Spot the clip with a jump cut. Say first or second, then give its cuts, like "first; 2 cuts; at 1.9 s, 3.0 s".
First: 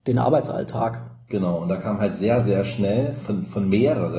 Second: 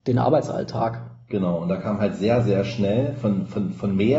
first; 1 cut; at 3.2 s